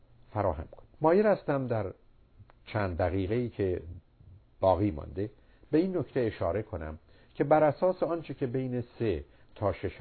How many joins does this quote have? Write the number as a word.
one